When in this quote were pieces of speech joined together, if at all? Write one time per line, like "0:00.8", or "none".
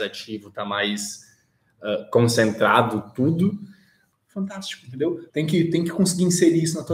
0:04.1
0:05.3